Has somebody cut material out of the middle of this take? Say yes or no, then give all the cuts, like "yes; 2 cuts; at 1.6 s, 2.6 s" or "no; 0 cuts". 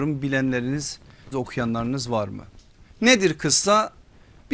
yes; 2 cuts; at 1.3 s, 2.9 s